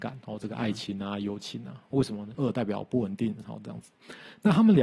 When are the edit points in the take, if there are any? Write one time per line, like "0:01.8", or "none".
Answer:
0:02.3
0:03.4